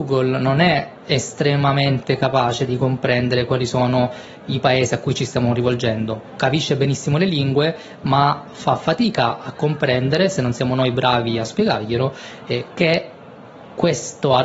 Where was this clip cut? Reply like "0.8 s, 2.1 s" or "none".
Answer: none